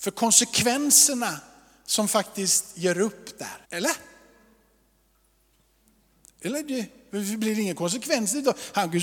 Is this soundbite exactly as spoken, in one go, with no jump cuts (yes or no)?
no